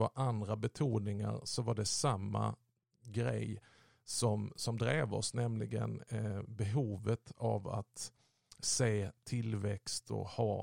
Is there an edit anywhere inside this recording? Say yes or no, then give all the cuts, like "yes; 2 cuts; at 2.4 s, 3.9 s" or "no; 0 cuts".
no; 0 cuts